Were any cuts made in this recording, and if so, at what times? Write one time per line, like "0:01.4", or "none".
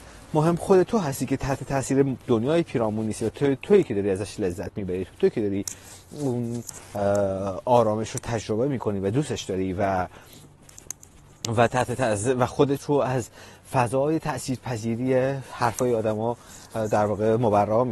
none